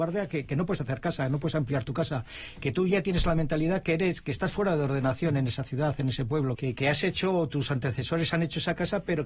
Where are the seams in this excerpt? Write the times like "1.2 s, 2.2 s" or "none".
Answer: 6.5 s